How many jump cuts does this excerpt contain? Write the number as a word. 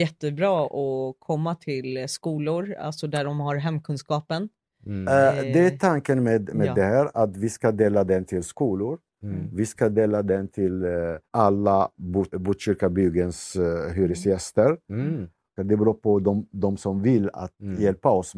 three